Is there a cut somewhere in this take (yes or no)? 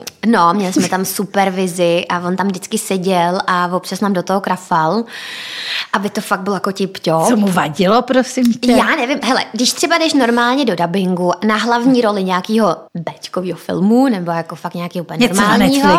yes